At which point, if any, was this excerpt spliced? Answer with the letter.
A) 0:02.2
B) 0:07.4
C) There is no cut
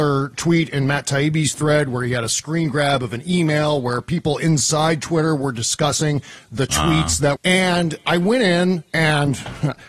B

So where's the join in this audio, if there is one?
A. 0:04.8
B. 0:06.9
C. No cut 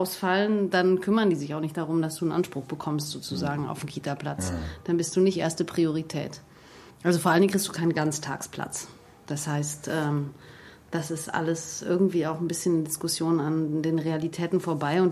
B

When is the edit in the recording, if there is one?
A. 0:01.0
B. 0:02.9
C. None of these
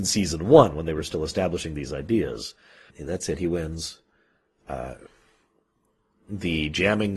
B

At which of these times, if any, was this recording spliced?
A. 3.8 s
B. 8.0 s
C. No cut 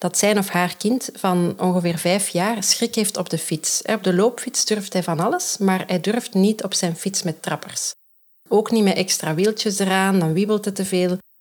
C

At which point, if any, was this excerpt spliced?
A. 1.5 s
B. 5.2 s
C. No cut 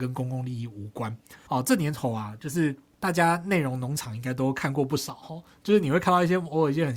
A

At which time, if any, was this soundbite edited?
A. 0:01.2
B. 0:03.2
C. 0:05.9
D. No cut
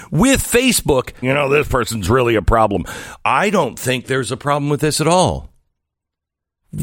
A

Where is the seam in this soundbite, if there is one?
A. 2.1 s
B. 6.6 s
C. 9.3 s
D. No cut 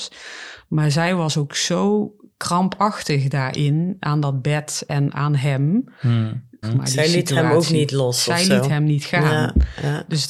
B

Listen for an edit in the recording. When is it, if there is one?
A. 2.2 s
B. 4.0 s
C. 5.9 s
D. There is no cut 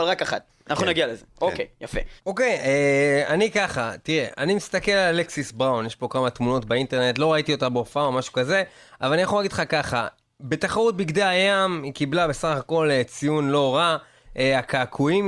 A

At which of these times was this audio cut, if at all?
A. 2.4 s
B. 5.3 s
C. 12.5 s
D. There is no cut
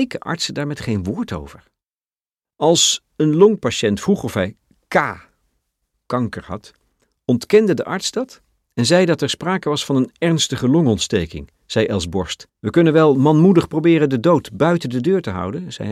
C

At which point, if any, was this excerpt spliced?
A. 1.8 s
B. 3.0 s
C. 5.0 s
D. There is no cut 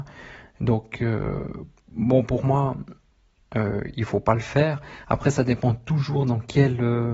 D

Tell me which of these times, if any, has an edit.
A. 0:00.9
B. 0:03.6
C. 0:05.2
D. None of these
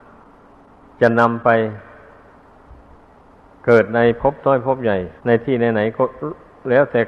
C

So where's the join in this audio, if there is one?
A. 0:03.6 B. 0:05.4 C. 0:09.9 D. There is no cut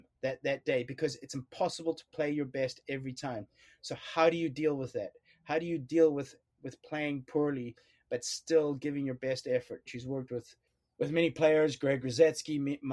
C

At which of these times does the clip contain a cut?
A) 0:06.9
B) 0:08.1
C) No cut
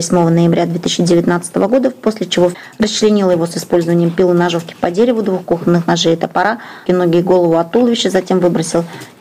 A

